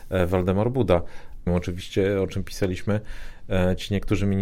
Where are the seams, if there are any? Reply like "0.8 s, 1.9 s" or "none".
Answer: 1.5 s